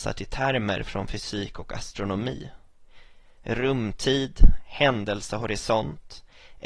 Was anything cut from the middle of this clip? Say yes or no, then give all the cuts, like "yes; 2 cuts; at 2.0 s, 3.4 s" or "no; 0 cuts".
no; 0 cuts